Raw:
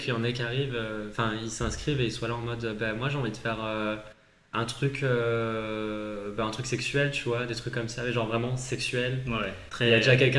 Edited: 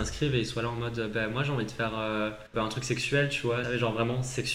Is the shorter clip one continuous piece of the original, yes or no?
no